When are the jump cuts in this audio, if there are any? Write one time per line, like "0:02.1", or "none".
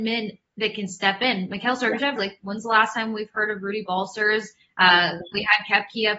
0:02.2